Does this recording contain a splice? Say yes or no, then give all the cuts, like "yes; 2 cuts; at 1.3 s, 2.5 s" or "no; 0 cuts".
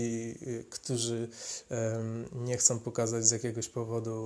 no; 0 cuts